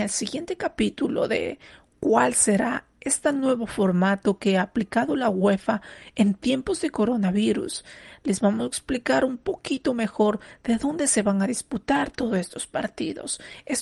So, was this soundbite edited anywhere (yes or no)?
no